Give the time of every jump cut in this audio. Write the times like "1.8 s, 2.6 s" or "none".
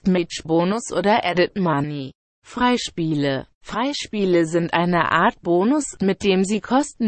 none